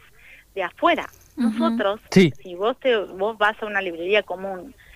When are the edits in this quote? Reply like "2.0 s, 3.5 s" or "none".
none